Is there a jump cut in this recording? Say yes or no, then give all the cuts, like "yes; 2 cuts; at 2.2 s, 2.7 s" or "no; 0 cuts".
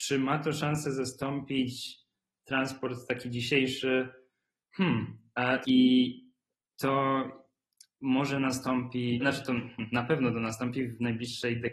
yes; 2 cuts; at 5.6 s, 9.2 s